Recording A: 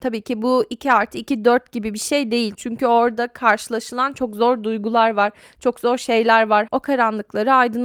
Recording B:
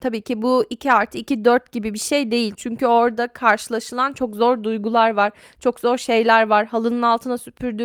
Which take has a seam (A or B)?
A